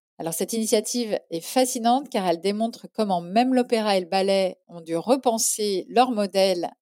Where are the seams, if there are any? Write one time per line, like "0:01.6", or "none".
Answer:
none

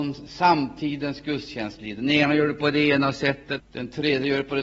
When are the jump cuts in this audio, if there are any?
0:03.6

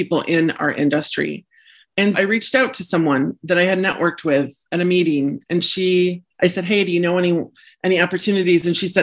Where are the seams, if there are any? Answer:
0:02.1

